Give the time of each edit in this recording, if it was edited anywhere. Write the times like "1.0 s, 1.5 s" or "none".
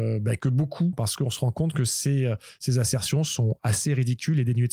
0.9 s